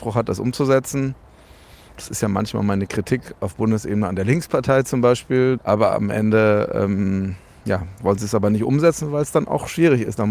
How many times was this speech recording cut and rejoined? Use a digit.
1